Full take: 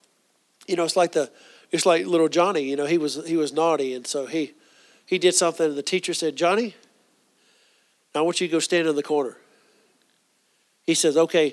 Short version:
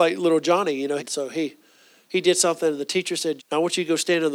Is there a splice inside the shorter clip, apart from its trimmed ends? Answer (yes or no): yes